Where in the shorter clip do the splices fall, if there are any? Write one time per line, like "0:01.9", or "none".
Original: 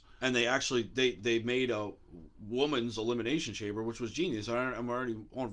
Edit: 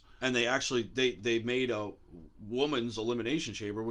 none